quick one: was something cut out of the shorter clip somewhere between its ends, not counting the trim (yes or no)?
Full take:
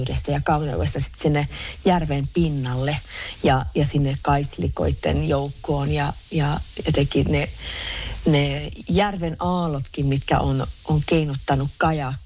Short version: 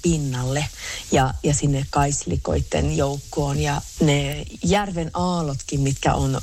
yes